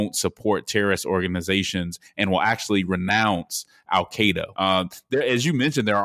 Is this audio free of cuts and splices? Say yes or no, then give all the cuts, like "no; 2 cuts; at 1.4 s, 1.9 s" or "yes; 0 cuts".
no; 1 cut; at 4.5 s